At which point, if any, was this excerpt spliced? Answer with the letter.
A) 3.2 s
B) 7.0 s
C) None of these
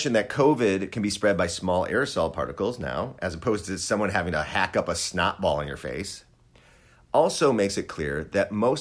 C